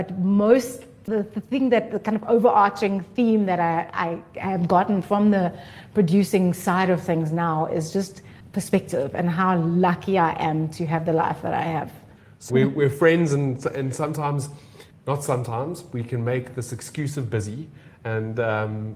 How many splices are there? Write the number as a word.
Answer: one